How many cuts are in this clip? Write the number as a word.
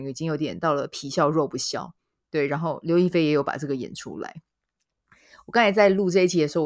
zero